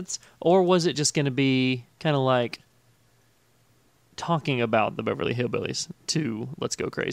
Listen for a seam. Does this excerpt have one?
no; 0 cuts

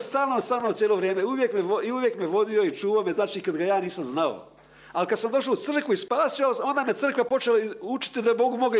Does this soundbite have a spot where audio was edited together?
no; 0 cuts

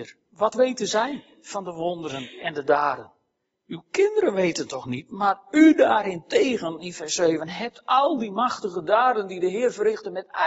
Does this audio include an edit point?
no; 0 cuts

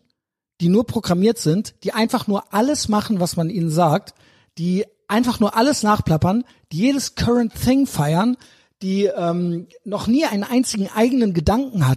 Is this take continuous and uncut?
yes; 0 cuts

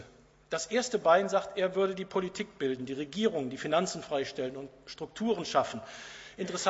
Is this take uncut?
yes; 0 cuts

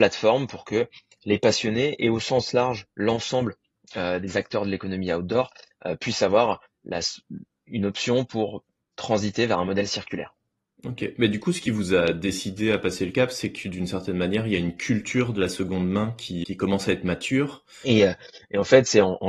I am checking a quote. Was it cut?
yes; 2 cuts; at 16.4 s, 17.8 s

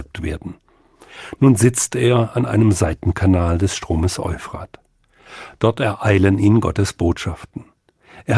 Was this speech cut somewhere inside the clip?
no; 0 cuts

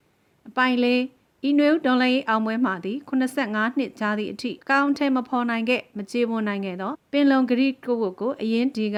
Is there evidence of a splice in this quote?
yes; 1 cut; at 4.6 s

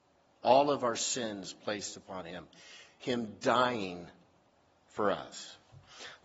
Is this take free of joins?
yes; 0 cuts

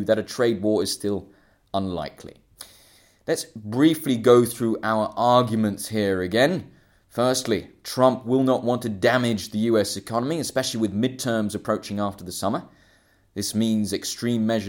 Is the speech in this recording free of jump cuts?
yes; 0 cuts

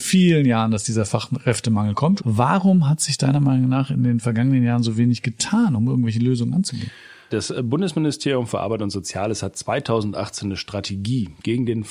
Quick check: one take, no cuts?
no; 2 cuts; at 2.2 s, 7.3 s

